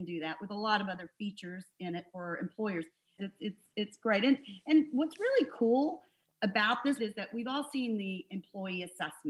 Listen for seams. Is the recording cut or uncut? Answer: cut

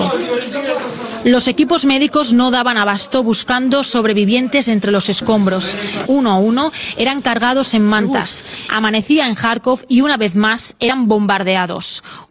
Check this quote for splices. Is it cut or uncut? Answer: cut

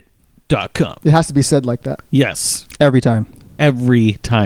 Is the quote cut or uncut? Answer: uncut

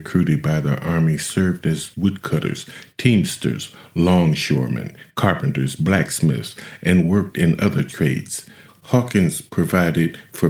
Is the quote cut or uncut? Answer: cut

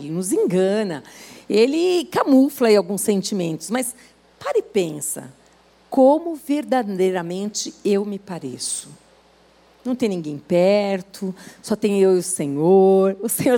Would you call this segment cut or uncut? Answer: uncut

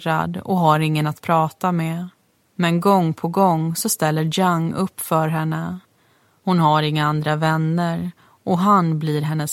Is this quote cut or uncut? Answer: uncut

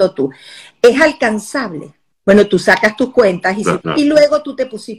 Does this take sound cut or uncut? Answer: cut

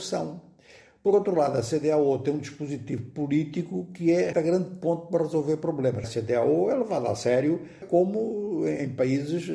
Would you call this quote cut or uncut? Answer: cut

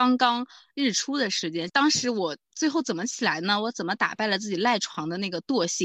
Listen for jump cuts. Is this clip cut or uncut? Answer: cut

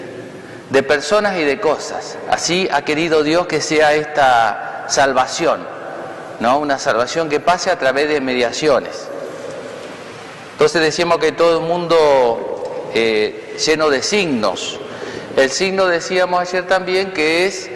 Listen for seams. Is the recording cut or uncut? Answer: uncut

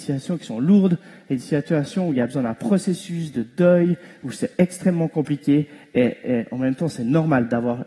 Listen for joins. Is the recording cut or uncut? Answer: uncut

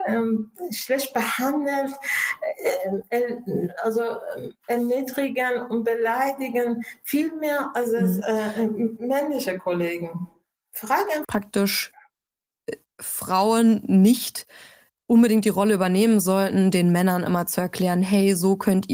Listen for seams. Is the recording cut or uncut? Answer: cut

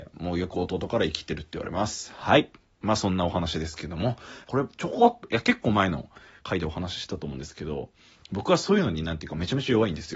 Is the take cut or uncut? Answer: cut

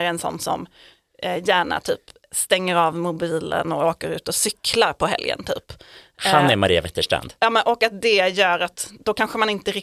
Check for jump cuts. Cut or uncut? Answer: uncut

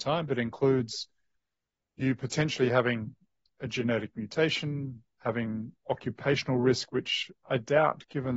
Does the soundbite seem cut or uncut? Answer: uncut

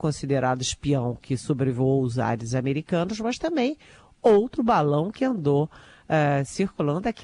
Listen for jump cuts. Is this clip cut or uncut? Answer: uncut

